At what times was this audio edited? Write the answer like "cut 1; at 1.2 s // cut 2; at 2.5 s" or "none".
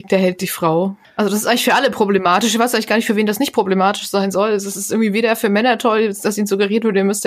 none